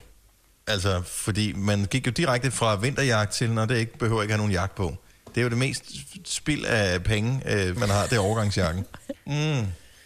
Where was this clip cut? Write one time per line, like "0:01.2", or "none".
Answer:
0:07.8
0:09.1